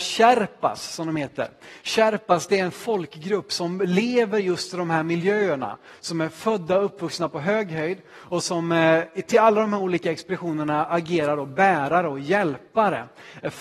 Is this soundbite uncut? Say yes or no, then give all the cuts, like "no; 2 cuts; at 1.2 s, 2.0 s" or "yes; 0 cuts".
yes; 0 cuts